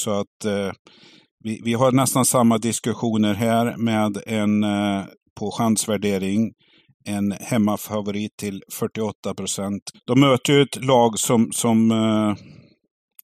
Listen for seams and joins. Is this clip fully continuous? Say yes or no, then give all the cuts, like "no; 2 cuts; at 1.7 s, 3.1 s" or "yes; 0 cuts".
no; 1 cut; at 9.9 s